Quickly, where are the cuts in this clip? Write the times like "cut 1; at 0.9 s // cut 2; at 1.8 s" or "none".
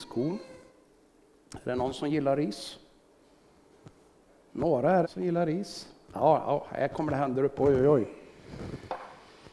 cut 1; at 5.0 s